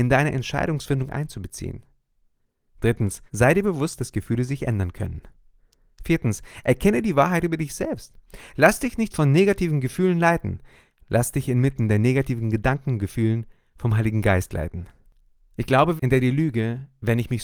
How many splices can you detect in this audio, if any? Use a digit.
2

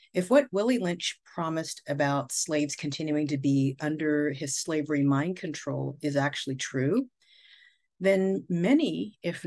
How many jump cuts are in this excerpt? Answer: 0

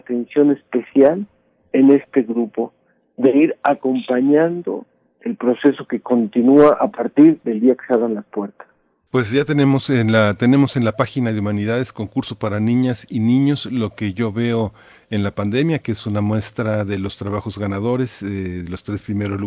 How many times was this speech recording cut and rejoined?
1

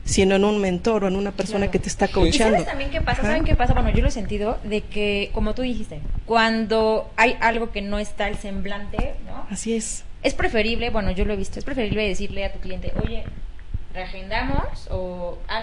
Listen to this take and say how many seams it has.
1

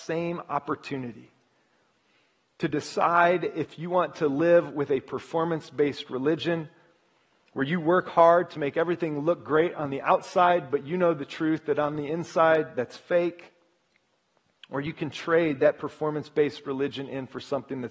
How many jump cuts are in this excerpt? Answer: 0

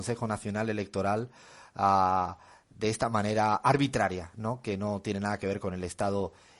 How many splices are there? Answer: 0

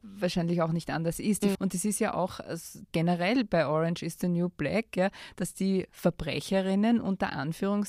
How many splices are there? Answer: 2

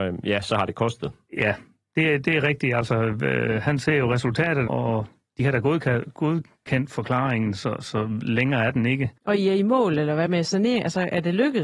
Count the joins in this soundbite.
3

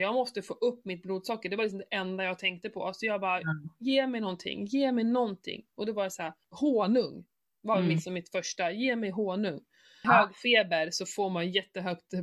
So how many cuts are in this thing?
2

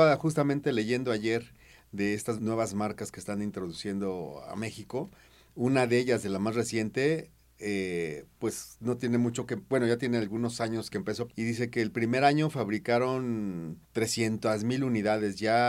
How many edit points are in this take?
3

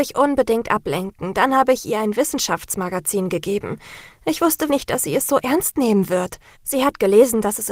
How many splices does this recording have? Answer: 2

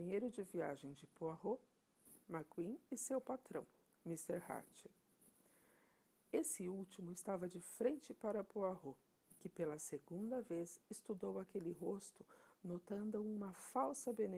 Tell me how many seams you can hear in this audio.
0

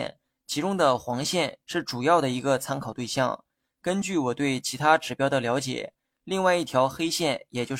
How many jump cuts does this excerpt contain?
1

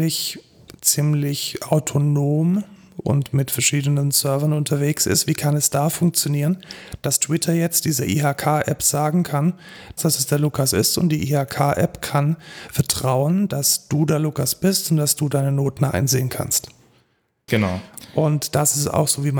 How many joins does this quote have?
2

